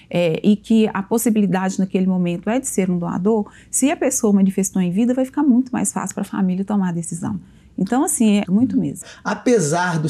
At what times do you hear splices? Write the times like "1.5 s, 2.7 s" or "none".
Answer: 8.4 s